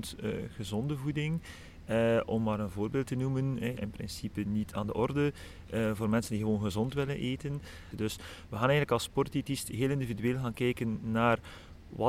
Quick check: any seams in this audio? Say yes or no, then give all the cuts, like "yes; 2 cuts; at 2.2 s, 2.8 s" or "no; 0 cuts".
yes; 2 cuts; at 3.8 s, 7.9 s